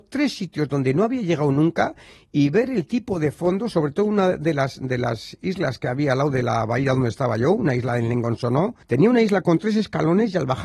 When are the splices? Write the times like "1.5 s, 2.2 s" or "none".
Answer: 8.8 s